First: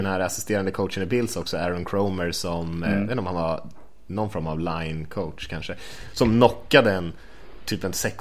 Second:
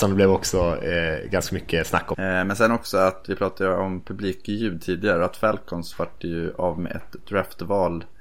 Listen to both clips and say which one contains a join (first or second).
second